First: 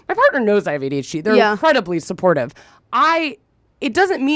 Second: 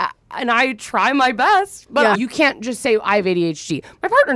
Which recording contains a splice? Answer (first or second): second